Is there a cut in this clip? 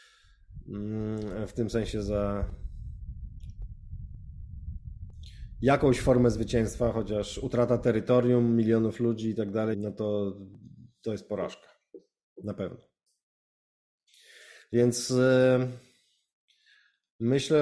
yes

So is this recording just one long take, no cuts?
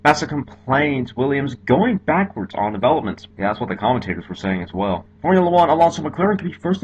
yes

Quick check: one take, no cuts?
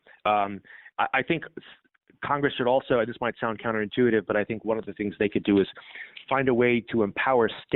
yes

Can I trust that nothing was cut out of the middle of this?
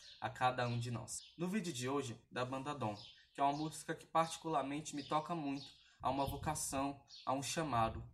no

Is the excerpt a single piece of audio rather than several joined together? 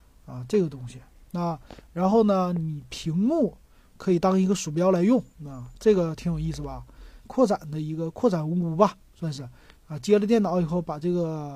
no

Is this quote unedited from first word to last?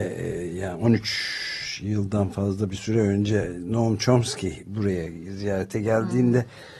yes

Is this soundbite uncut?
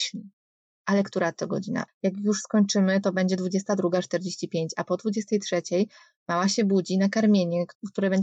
no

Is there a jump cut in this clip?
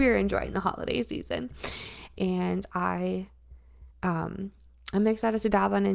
yes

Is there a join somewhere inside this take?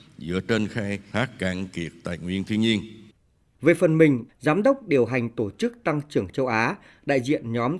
yes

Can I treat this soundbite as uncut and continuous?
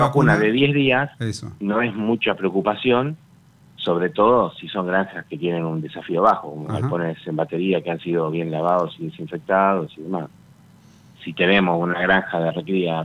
yes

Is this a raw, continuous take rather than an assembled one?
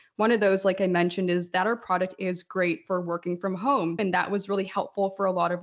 no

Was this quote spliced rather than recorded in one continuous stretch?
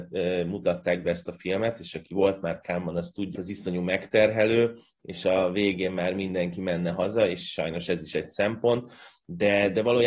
yes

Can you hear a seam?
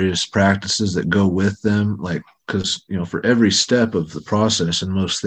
no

